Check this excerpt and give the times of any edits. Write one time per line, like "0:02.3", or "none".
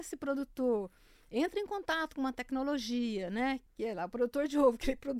none

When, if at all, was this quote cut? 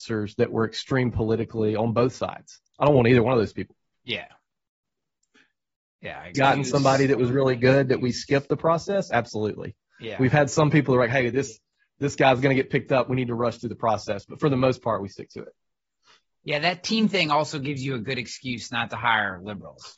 0:06.3

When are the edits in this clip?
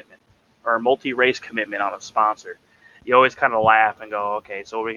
none

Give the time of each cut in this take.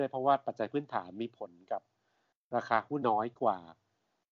0:03.0

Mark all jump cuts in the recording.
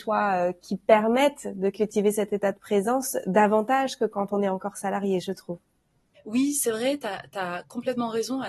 0:06.1

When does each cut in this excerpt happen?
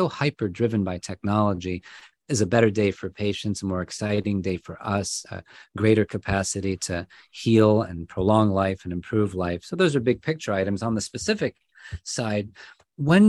none

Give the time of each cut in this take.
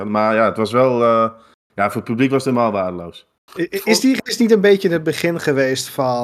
none

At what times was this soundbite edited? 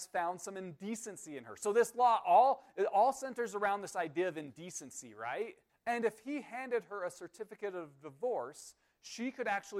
0:05.7

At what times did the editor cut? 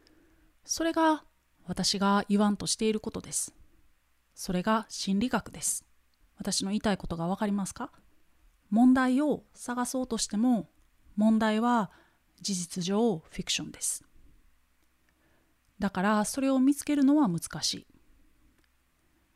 0:06.2

